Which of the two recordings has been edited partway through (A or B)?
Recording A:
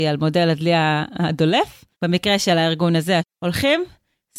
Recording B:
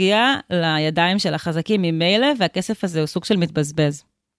A